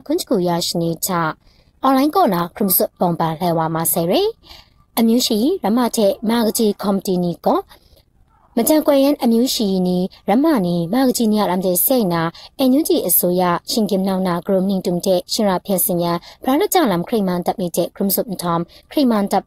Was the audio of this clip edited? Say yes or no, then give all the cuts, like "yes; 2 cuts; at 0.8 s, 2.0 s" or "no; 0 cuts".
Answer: no; 0 cuts